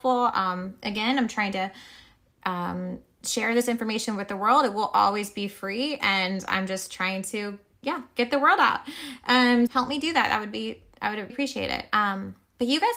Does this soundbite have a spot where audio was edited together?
yes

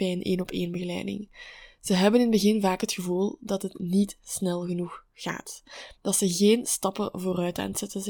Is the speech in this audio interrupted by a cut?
no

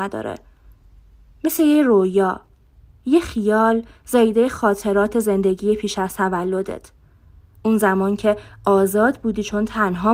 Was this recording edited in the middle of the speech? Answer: no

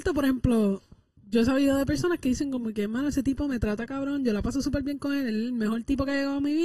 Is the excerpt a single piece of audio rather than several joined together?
yes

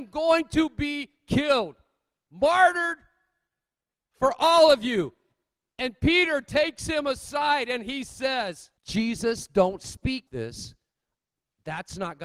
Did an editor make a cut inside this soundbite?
yes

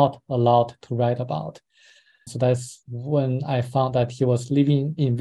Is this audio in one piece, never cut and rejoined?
no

